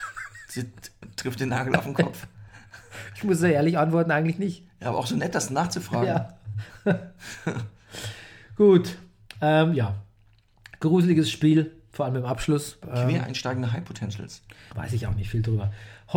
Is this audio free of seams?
no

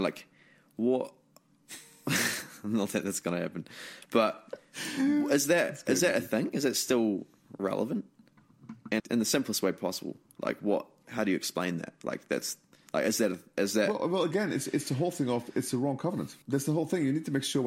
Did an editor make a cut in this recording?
yes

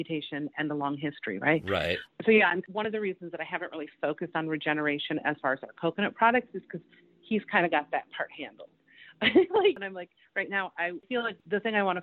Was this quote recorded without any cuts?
yes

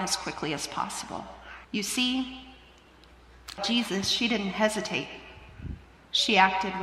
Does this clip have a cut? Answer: yes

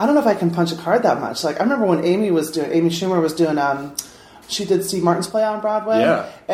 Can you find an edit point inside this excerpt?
no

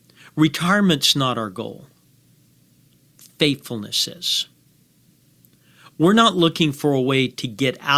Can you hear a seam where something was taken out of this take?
no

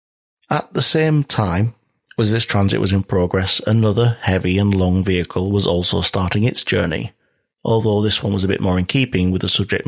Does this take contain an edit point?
no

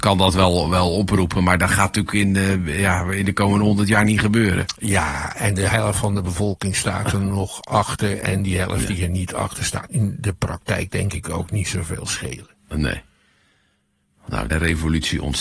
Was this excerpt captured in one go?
no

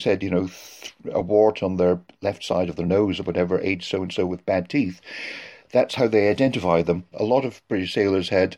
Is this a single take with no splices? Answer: no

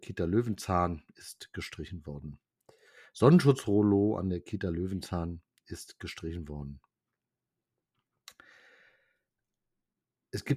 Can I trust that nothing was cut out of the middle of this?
yes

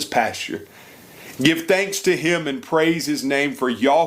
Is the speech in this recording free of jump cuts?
no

